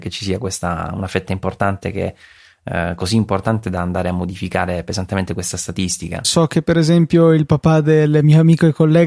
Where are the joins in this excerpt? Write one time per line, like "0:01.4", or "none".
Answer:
0:06.2